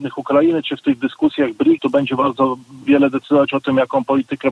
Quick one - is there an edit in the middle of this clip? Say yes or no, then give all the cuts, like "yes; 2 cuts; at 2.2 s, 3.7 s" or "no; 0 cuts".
yes; 1 cut; at 1.8 s